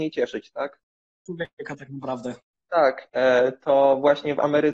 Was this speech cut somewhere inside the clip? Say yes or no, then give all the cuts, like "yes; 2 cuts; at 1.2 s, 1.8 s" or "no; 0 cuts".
yes; 2 cuts; at 1.3 s, 3.1 s